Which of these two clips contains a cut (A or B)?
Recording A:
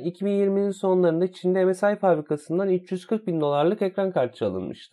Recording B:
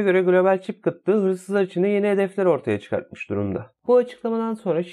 B